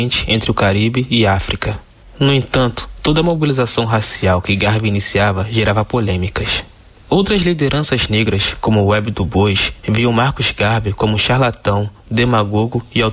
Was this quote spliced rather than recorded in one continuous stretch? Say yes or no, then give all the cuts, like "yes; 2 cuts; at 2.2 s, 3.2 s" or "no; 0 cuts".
no; 0 cuts